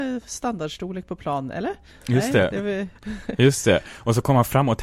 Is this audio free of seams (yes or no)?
no